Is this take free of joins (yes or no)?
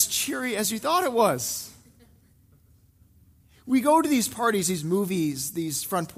yes